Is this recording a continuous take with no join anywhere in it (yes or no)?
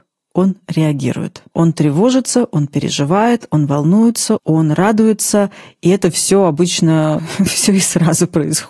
no